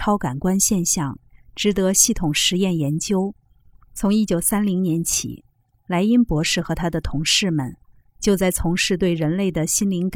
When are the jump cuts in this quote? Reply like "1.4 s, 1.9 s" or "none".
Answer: 3.8 s